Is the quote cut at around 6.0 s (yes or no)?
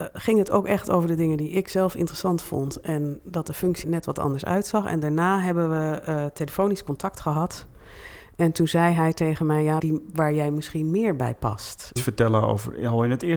no